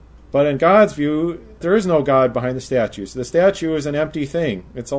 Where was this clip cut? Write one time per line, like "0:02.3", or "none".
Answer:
0:01.6